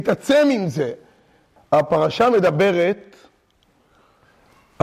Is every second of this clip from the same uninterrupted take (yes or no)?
no